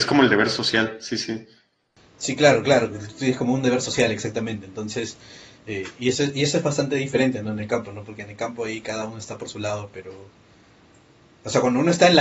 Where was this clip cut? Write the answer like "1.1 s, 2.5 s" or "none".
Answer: none